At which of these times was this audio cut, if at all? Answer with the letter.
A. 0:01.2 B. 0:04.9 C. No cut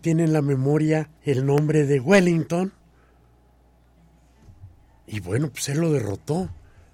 A